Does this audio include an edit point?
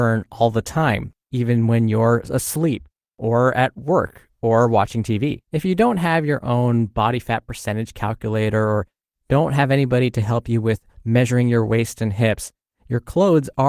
yes; 1 cut; at 5.4 s

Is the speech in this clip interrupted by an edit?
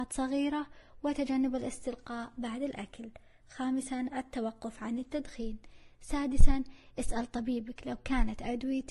no; 0 cuts

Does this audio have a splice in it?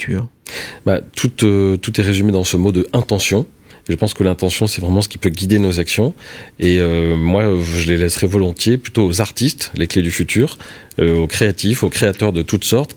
no; 0 cuts

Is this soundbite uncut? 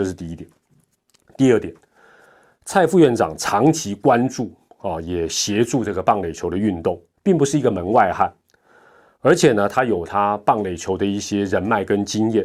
no; 1 cut; at 7.1 s

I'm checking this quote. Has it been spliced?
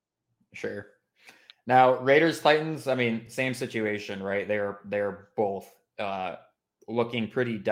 no; 0 cuts

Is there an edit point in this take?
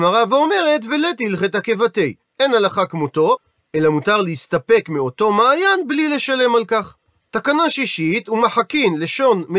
no; 0 cuts

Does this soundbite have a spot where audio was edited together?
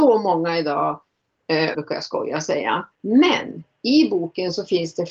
yes; 2 cuts; at 1.7 s, 2.9 s

